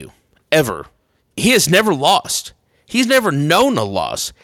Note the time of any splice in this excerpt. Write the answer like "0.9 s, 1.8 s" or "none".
1.2 s